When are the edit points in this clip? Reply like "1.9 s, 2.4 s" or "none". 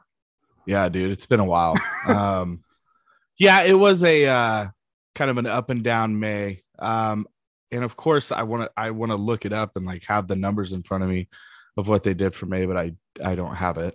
none